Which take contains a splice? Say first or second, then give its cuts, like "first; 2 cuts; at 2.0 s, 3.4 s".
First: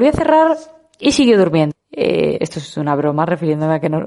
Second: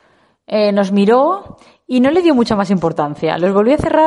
first; 1 cut; at 1.7 s